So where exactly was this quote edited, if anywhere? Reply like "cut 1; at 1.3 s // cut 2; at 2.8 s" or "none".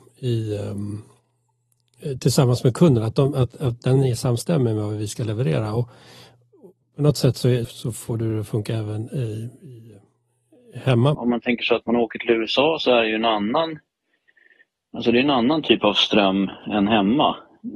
cut 1; at 7.6 s // cut 2; at 11.1 s